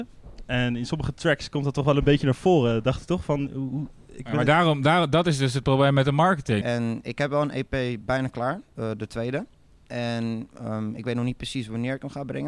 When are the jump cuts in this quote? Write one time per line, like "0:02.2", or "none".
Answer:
0:06.6